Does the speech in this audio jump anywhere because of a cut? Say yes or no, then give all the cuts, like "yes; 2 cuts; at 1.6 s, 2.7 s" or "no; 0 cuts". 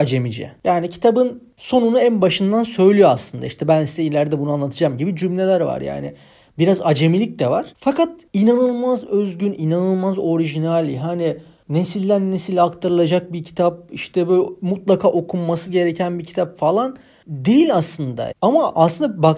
yes; 2 cuts; at 7.7 s, 18.3 s